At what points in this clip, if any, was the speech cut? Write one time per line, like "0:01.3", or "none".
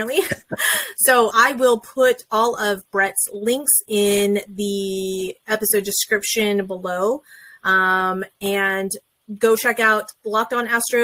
0:01.3